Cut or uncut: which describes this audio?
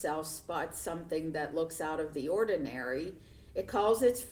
uncut